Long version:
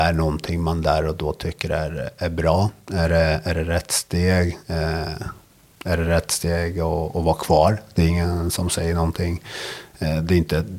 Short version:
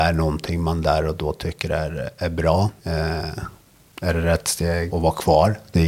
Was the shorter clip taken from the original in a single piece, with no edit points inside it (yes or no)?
no